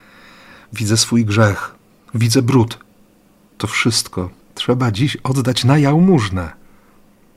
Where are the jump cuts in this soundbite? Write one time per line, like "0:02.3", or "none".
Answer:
0:02.1
0:04.4